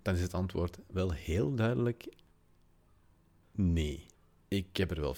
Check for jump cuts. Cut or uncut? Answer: uncut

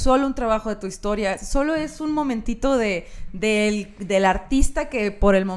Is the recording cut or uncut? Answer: uncut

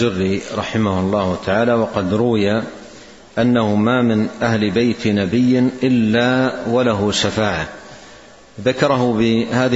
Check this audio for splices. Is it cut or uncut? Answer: uncut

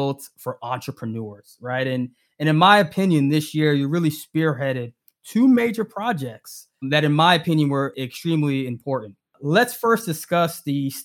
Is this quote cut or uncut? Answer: uncut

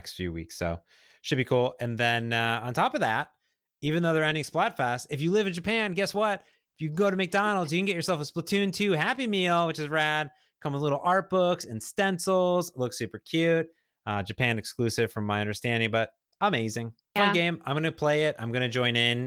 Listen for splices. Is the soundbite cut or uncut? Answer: cut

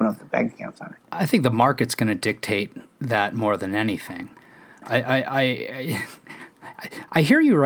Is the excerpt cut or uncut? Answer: uncut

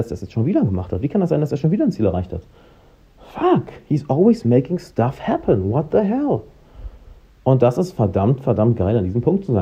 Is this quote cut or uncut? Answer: uncut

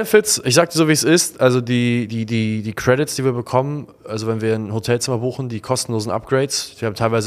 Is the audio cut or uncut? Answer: uncut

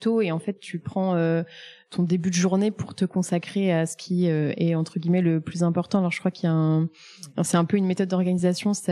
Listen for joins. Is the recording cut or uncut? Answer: uncut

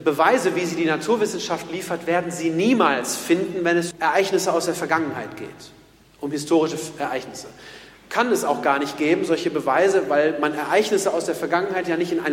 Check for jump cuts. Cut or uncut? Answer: cut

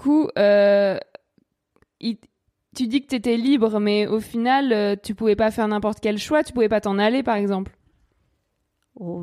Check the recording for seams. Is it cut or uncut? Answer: uncut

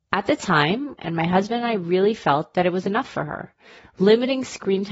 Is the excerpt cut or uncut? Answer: cut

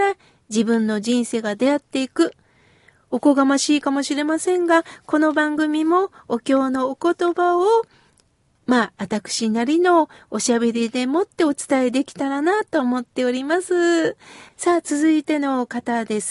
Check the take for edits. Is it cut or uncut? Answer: cut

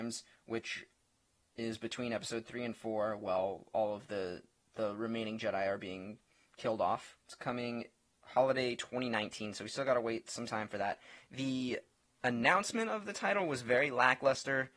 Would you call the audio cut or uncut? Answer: uncut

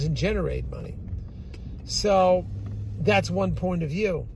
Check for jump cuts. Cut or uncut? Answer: uncut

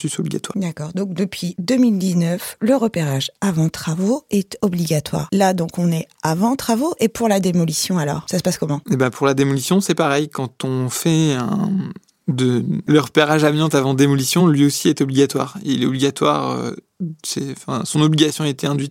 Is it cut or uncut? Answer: uncut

